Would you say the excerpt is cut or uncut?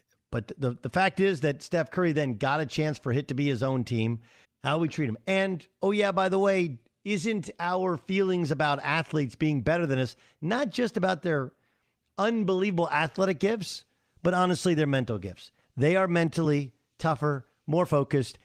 cut